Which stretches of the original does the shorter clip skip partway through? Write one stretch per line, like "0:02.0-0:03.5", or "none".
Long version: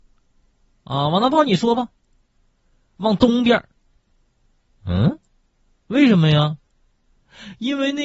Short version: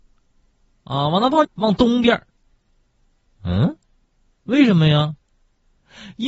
0:01.4-0:02.9